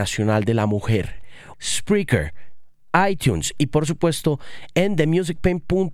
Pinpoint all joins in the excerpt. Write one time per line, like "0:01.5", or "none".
0:01.5